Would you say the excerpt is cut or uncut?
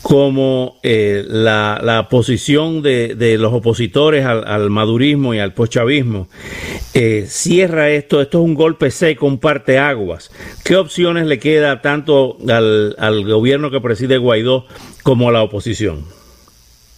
uncut